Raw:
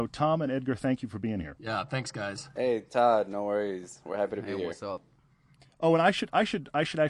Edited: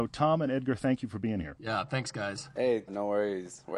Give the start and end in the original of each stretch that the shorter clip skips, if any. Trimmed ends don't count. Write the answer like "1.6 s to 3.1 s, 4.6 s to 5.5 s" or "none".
2.9 s to 3.3 s